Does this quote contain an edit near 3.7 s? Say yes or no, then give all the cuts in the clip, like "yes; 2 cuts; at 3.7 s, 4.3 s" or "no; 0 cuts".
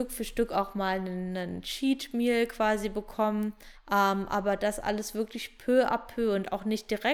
yes; 1 cut; at 3.7 s